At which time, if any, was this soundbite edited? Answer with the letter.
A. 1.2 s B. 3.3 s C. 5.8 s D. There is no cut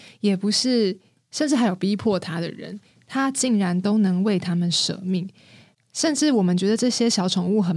C